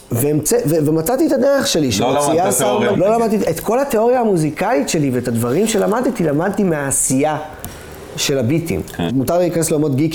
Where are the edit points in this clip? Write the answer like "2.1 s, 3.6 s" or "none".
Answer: 2.9 s, 9.1 s